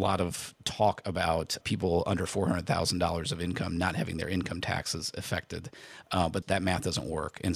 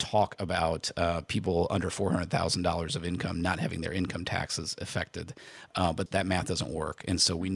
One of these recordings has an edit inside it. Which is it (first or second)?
first